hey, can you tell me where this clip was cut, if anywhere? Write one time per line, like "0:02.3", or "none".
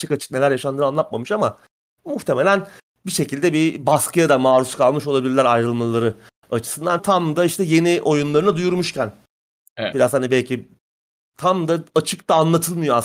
0:07.0
0:09.9